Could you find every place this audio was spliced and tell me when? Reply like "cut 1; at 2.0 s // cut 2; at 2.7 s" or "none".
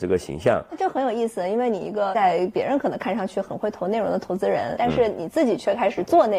cut 1; at 4.8 s